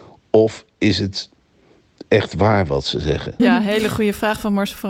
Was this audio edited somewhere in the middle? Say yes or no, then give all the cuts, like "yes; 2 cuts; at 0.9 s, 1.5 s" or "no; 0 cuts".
yes; 1 cut; at 3.4 s